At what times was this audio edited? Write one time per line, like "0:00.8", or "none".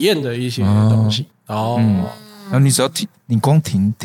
0:01.3